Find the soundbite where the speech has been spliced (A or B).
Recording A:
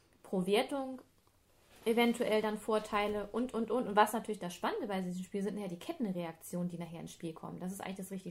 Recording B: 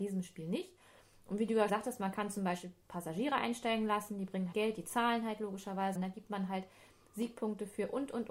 B